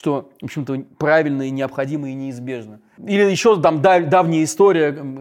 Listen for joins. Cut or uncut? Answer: uncut